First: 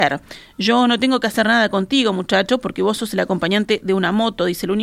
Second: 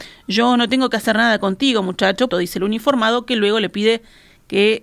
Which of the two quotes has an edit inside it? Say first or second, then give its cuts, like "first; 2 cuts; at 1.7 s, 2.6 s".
second; 1 cut; at 2.3 s